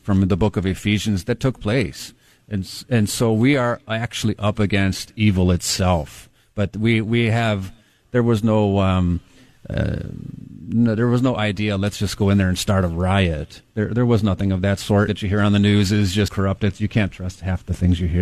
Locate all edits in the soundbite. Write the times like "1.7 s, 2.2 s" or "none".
15.1 s, 16.3 s